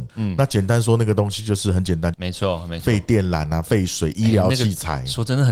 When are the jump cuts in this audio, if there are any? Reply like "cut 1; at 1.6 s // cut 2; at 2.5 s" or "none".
cut 1; at 2.1 s